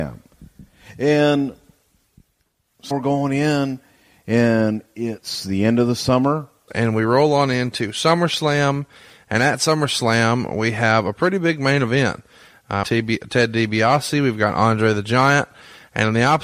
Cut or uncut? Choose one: cut